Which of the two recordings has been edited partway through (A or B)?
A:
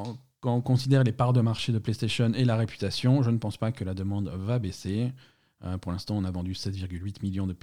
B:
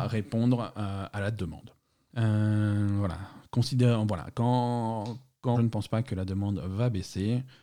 B